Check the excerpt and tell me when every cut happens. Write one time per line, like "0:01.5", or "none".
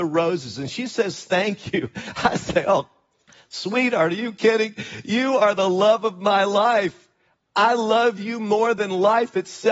none